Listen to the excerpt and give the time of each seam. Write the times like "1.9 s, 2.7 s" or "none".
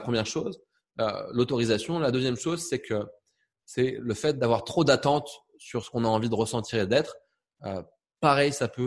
none